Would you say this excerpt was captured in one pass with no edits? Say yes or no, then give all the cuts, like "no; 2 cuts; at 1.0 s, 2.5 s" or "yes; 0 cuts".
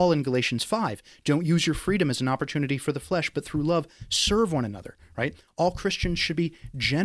yes; 0 cuts